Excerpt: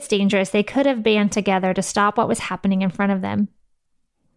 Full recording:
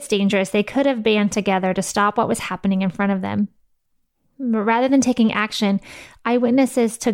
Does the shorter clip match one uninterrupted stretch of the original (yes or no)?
yes